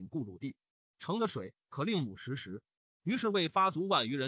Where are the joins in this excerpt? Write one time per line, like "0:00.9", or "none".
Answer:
none